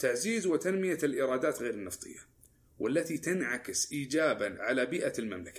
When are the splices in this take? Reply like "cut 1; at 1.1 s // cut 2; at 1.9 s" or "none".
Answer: cut 1; at 4.6 s